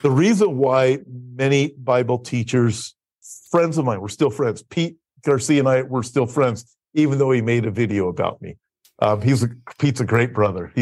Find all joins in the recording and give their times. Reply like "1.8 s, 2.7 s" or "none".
none